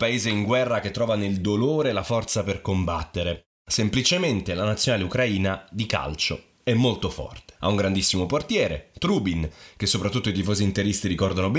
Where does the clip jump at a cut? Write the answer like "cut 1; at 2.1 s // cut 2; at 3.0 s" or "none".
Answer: cut 1; at 7.6 s

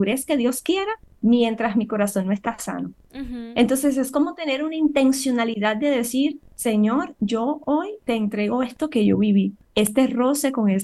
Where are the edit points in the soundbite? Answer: cut 1; at 3.1 s

